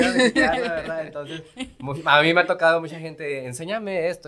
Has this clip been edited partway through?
no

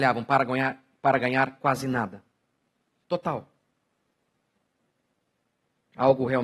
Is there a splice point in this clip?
yes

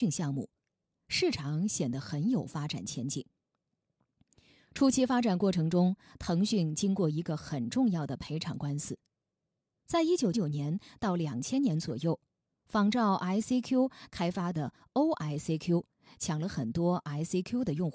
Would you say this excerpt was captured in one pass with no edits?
no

